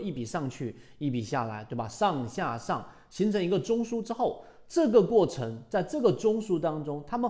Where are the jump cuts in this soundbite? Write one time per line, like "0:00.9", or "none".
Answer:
none